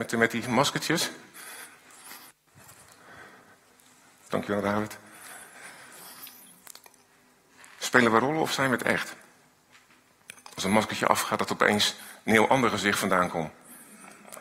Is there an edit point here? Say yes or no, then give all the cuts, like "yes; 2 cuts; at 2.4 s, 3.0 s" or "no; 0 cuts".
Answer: no; 0 cuts